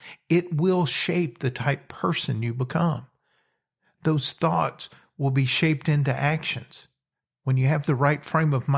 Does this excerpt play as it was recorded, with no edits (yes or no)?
no